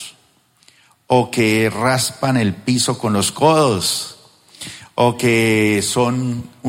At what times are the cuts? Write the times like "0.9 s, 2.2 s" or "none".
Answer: 0.9 s